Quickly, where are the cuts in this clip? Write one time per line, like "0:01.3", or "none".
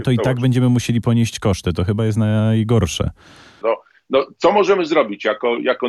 0:03.6